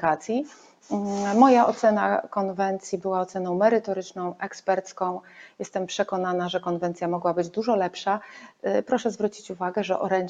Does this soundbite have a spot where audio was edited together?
no; 0 cuts

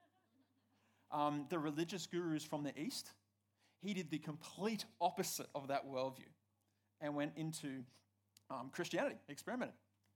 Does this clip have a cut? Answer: no; 0 cuts

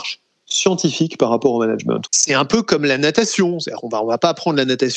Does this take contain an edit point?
yes; 1 cut; at 2.1 s

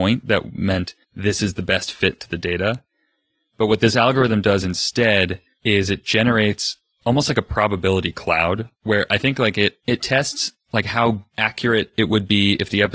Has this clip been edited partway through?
yes; 1 cut; at 1.0 s

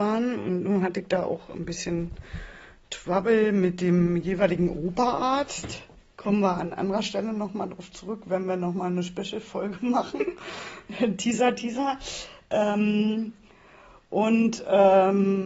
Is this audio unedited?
yes; 0 cuts

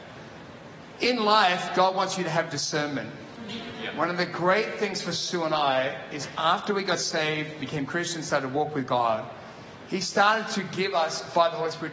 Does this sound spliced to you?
no; 0 cuts

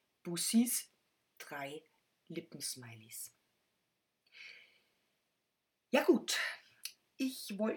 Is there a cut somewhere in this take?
no; 0 cuts

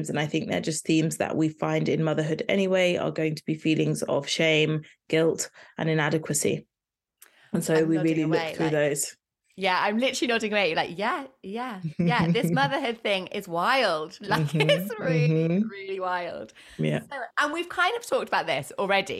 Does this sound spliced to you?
no; 0 cuts

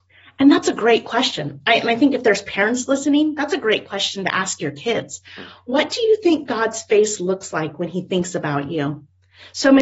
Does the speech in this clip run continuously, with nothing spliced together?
yes; 0 cuts

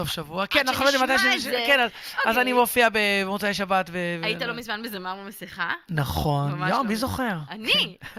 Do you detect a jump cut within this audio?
no; 0 cuts

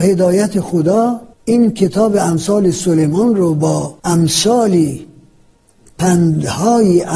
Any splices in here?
yes; 2 cuts; at 1.3 s, 4.0 s

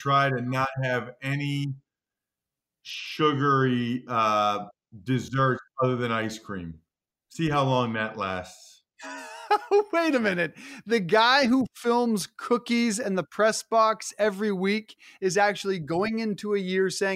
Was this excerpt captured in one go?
yes; 0 cuts

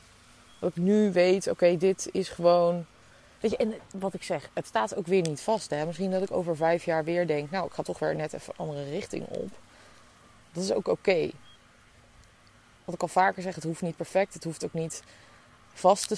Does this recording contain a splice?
no; 0 cuts

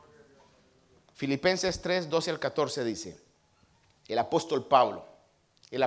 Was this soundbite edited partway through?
no; 0 cuts

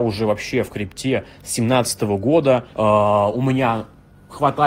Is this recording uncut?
no; 1 cut; at 2.7 s

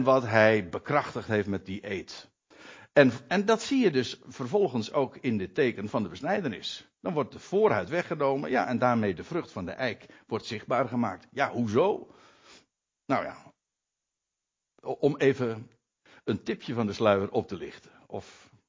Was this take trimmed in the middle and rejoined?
no; 0 cuts

